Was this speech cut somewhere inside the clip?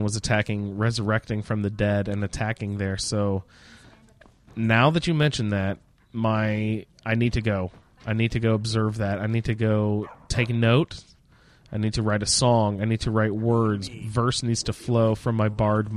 no; 0 cuts

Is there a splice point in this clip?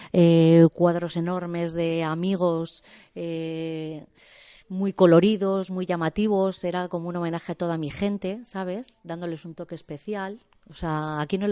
no; 0 cuts

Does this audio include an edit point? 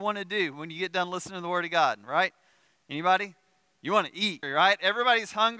yes; 1 cut; at 4.4 s

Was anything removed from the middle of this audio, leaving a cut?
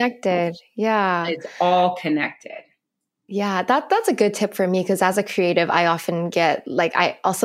no; 0 cuts

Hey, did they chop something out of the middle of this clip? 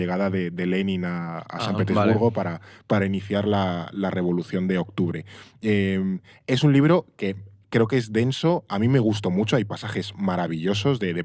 no; 0 cuts

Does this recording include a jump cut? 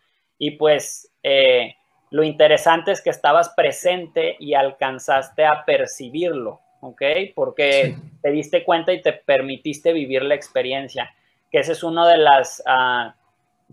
no; 0 cuts

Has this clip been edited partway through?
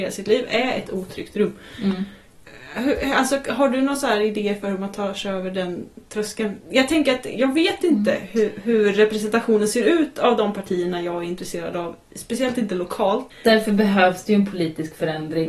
yes; 1 cut; at 13.3 s

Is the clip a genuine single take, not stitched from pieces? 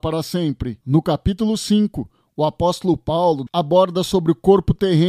no; 1 cut; at 3.5 s

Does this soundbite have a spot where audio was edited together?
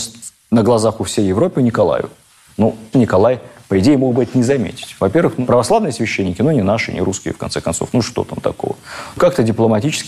yes; 1 cut; at 2.9 s

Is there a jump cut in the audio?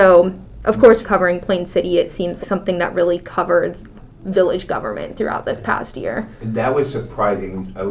yes; 2 cuts; at 1.0 s, 2.4 s

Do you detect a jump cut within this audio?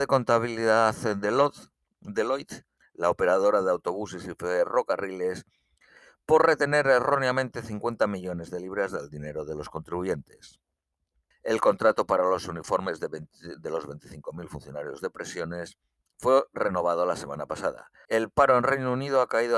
yes; 3 cuts; at 2.8 s, 11.3 s, 18.1 s

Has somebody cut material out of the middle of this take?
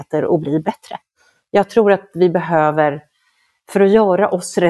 no; 0 cuts

